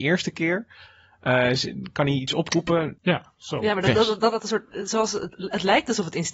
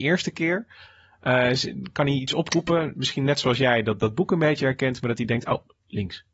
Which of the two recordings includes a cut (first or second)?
first